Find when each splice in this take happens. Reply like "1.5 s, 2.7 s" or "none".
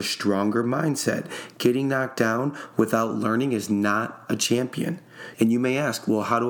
5.3 s